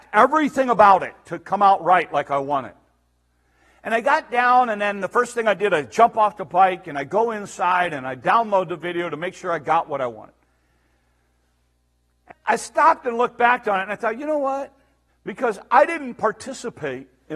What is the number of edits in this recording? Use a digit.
2